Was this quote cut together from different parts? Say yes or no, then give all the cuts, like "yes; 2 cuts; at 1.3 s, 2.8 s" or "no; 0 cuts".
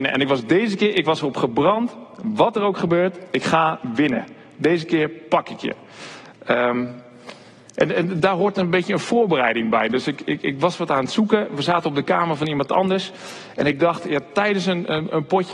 no; 0 cuts